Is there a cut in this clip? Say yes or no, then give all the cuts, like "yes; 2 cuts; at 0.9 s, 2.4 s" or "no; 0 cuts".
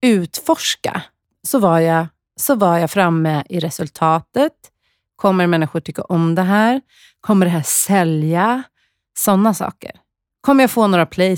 no; 0 cuts